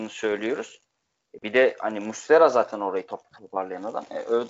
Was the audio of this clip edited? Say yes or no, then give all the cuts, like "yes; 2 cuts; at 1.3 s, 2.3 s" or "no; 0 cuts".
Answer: no; 0 cuts